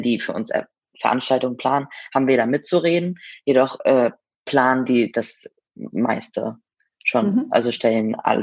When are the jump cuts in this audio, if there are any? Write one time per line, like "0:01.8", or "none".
none

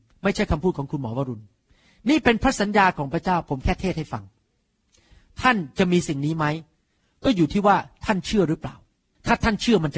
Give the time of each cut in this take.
none

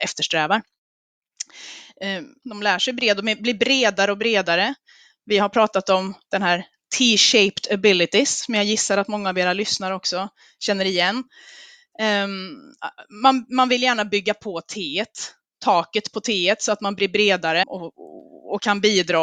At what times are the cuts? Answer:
0:02.4
0:17.6

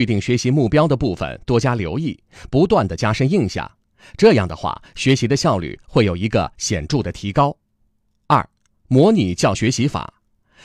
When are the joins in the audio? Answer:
0:09.6

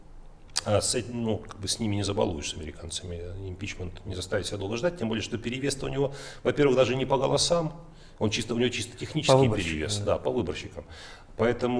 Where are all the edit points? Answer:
none

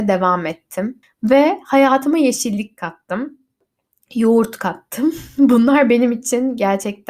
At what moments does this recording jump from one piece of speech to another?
0:01.0

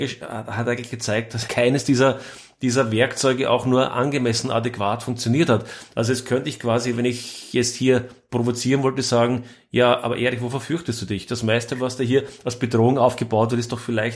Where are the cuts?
0:01.5

